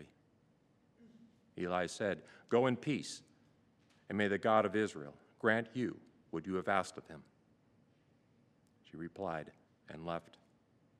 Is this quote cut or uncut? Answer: cut